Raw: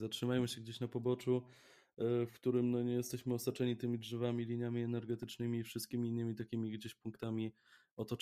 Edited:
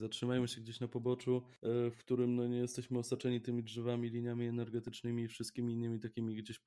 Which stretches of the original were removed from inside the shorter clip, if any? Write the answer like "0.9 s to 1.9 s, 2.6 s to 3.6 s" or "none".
1.6 s to 1.9 s